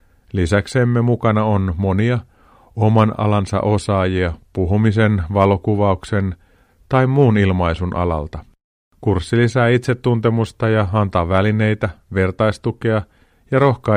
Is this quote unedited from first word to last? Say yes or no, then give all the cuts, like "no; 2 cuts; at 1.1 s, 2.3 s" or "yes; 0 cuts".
yes; 0 cuts